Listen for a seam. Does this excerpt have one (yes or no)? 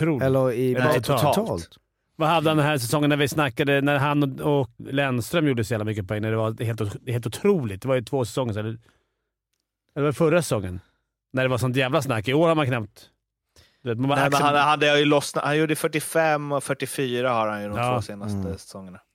yes